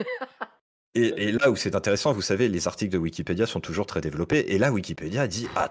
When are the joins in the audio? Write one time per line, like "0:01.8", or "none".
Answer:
none